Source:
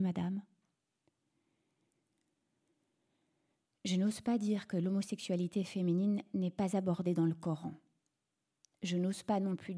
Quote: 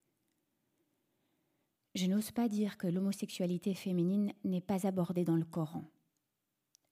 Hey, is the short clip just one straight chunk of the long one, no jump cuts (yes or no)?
yes